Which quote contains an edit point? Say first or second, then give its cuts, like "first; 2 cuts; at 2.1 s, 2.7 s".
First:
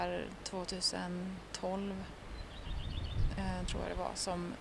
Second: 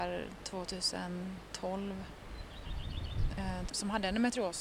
second; 1 cut; at 3.7 s